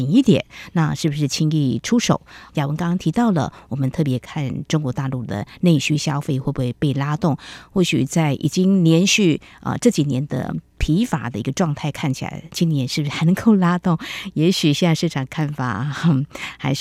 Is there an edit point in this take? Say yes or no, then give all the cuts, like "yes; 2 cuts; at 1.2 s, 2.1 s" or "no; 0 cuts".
yes; 1 cut; at 2.5 s